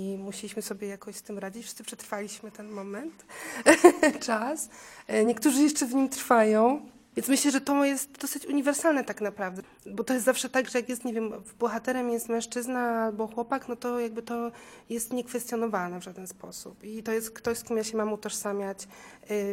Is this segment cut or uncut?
uncut